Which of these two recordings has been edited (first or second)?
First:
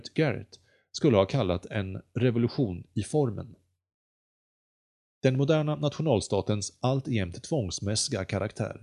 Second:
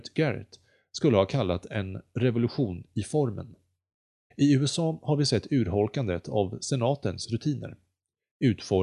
second